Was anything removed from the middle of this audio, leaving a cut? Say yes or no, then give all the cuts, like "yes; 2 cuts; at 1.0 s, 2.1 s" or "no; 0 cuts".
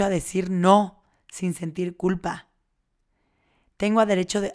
no; 0 cuts